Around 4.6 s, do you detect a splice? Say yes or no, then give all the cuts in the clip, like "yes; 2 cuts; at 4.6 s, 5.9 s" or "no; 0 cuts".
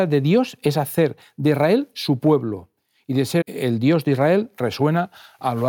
no; 1 cut; at 3.4 s